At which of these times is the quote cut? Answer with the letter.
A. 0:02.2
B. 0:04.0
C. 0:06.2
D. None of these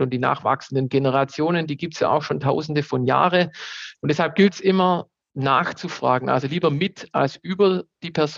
B